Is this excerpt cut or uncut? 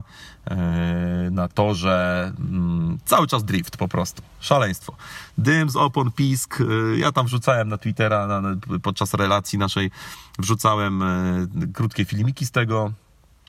uncut